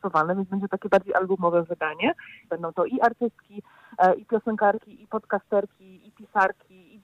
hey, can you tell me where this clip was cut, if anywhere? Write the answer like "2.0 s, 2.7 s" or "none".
2.5 s